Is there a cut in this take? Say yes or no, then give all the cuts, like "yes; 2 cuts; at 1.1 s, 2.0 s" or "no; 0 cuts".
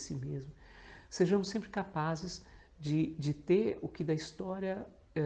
no; 0 cuts